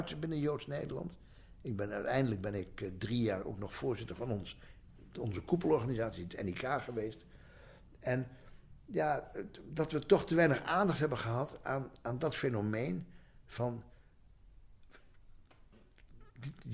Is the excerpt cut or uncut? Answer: uncut